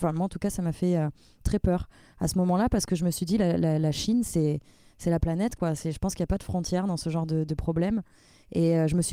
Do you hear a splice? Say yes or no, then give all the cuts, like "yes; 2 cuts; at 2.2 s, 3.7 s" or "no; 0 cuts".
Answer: no; 0 cuts